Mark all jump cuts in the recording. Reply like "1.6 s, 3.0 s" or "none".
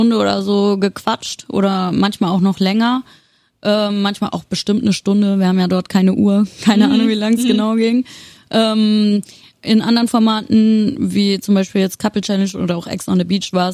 none